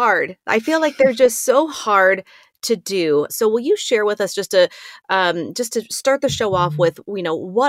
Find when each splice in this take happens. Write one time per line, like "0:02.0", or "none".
0:03.3